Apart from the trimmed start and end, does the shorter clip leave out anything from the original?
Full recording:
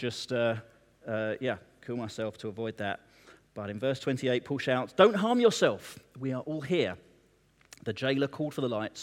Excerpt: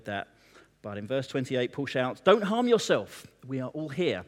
no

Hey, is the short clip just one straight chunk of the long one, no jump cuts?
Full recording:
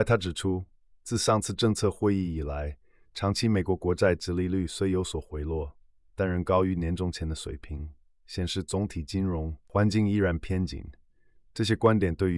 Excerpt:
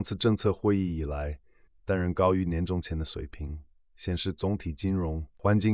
no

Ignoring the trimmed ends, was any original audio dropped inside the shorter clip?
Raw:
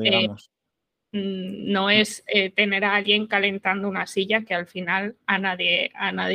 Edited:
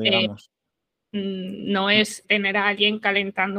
yes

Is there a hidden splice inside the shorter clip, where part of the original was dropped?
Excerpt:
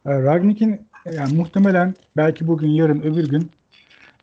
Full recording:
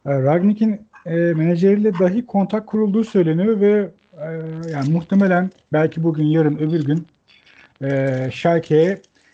yes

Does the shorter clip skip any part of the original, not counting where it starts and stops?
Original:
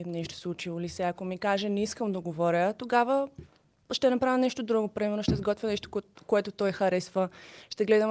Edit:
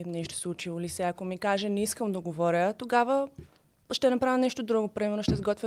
no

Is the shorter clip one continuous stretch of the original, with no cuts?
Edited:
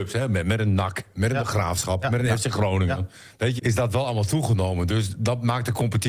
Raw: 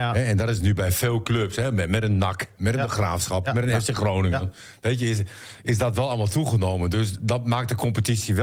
no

